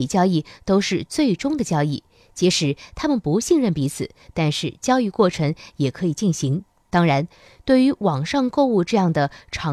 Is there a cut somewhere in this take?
no; 0 cuts

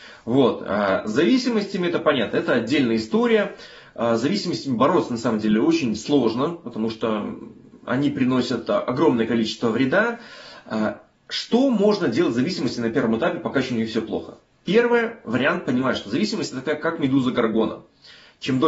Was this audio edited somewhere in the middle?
no; 0 cuts

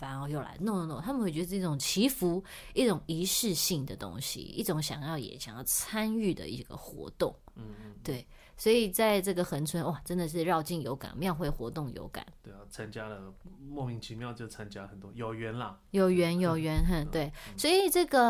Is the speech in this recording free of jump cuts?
yes; 0 cuts

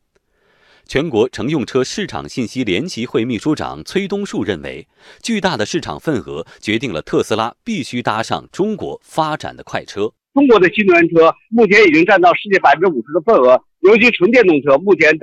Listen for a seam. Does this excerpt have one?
no; 0 cuts

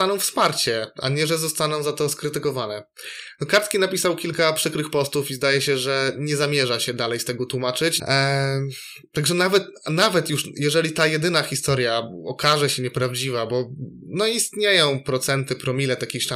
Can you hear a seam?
yes; 1 cut; at 8.0 s

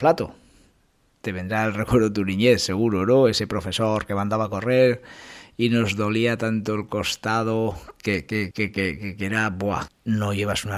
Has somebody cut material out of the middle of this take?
yes; 2 cuts; at 8.5 s, 9.9 s

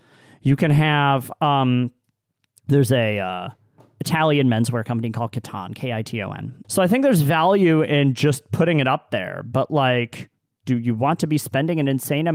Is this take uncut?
no; 1 cut; at 6.6 s

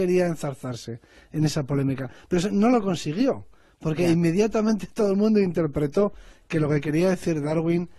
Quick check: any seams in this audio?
no; 0 cuts

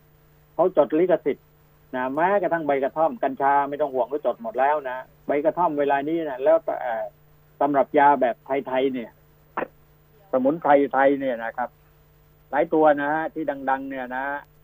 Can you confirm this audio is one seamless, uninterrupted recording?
yes; 0 cuts

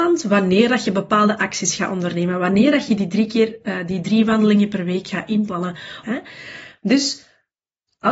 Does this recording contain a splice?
yes; 1 cut; at 6.0 s

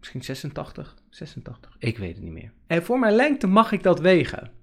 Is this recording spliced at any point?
yes; 1 cut; at 2.7 s

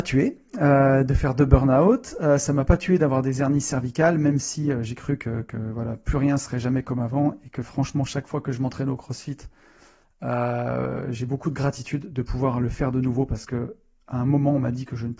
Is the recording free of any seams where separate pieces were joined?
yes; 0 cuts

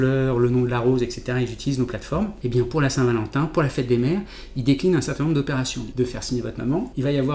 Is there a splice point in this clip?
yes; 1 cut; at 5.9 s

